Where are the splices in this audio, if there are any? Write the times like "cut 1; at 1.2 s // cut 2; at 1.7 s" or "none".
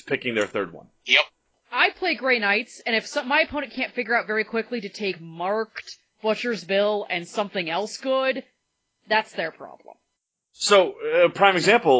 none